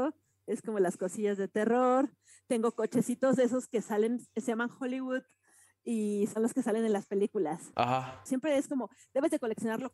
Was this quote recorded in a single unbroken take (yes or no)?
no